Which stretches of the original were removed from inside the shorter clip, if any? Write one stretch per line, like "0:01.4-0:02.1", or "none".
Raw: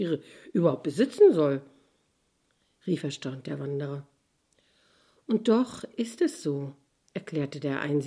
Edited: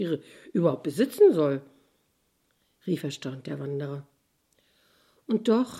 none